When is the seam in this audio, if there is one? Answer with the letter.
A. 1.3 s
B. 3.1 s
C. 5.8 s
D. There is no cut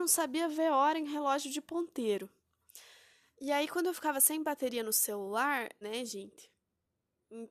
C